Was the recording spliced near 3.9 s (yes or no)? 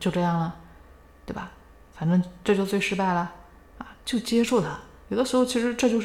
yes